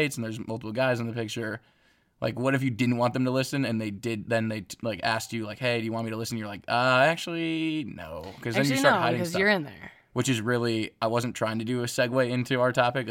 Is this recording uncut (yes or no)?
yes